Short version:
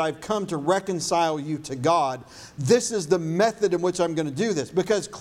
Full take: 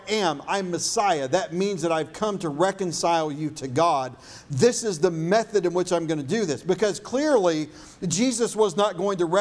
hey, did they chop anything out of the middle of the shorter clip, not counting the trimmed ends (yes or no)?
no